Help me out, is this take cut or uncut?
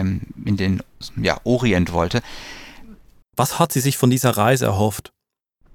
cut